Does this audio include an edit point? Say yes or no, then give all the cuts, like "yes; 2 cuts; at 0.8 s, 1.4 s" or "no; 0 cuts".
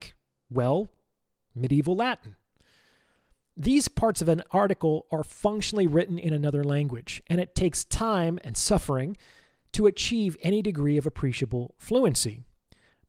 no; 0 cuts